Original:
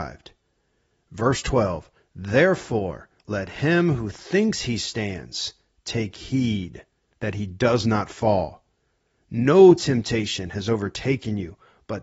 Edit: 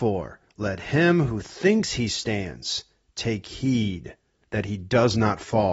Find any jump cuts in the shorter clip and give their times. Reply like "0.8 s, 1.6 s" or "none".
none